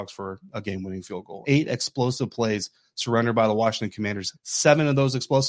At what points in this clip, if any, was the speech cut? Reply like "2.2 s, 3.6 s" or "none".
1.4 s, 4.3 s